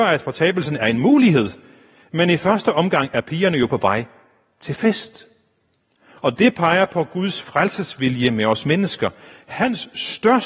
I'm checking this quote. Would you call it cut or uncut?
uncut